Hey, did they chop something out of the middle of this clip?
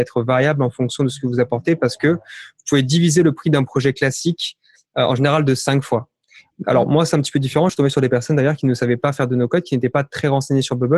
no; 0 cuts

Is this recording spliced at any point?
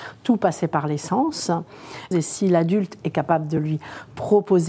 yes; 1 cut; at 2.1 s

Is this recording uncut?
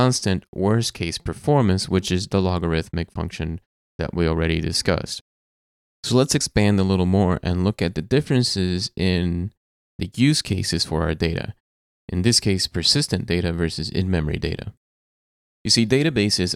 yes; 0 cuts

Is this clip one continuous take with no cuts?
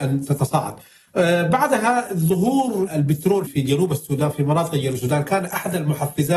no; 1 cut; at 3.5 s

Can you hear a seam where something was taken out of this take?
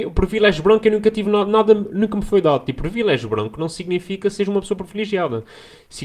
no; 0 cuts

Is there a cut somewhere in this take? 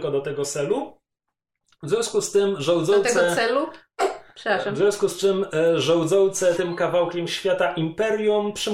yes; 1 cut; at 6.6 s

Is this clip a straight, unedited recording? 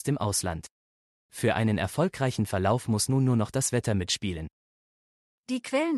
yes; 0 cuts

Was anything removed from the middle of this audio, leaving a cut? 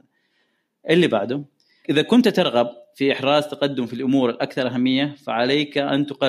yes; 1 cut; at 1.8 s

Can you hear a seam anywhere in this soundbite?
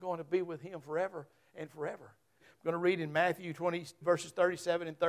yes; 2 cuts; at 2.4 s, 4.0 s

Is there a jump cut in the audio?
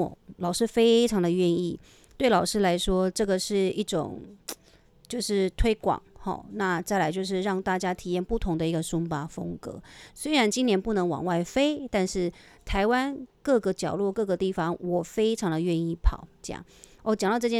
yes; 1 cut; at 10.1 s

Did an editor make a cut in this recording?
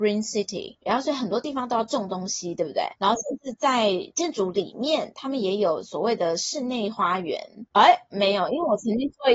yes; 1 cut; at 7.7 s

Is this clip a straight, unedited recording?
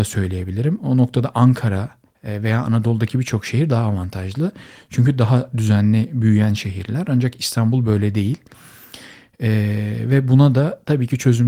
yes; 0 cuts

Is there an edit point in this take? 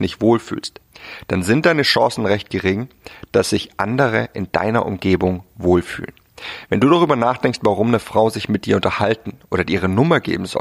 no; 0 cuts

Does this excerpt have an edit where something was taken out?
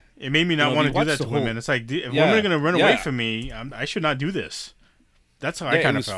no; 0 cuts

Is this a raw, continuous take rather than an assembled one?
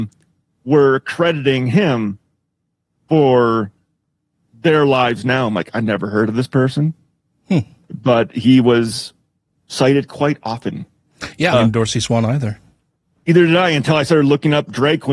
no; 1 cut; at 11.5 s

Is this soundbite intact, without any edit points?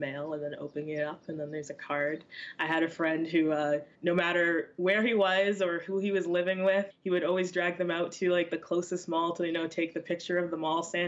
no; 2 cuts; at 3.9 s, 6.9 s

